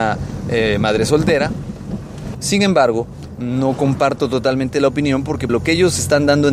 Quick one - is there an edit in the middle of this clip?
yes; 2 cuts; at 2.3 s, 5.5 s

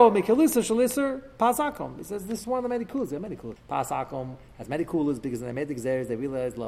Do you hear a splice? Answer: yes; 2 cuts; at 2.4 s, 3.6 s

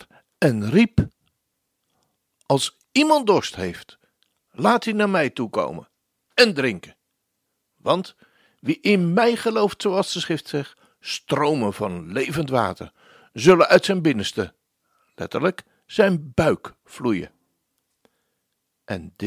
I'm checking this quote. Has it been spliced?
no; 0 cuts

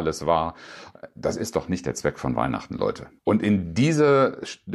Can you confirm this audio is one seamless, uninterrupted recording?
no; 1 cut; at 3.2 s

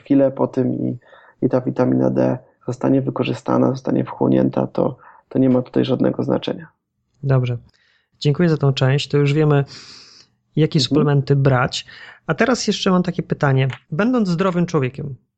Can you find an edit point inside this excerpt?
no; 0 cuts

